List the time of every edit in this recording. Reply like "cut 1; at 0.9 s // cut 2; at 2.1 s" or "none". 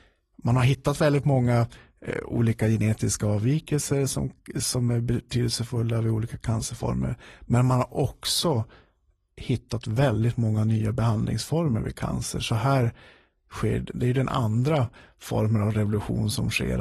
none

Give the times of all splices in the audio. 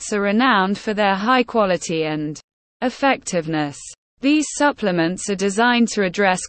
cut 1; at 4.1 s

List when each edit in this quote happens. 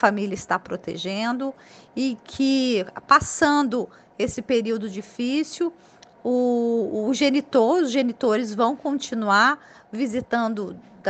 none

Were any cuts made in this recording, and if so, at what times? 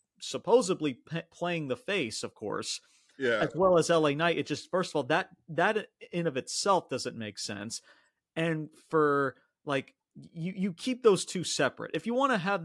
none

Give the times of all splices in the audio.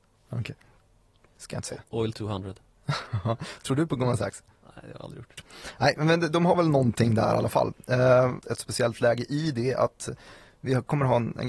cut 1; at 1.3 s // cut 2; at 8.4 s

